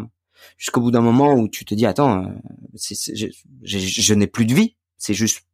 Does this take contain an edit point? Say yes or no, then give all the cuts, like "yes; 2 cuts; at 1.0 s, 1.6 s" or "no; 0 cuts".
no; 0 cuts